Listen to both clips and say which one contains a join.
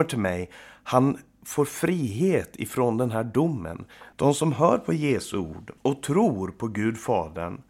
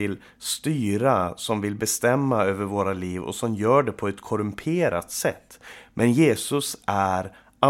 first; 2 cuts; at 4.1 s, 5.8 s

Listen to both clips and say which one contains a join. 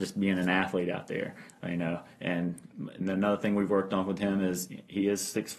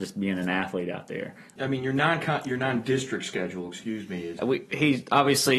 second; 2 cuts; at 1.6 s, 4.4 s

